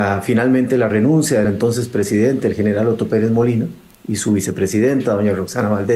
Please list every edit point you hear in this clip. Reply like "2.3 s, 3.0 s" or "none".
none